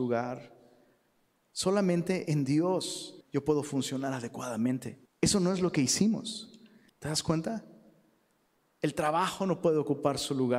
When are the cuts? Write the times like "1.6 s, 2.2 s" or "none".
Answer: 3.2 s, 5.1 s, 6.9 s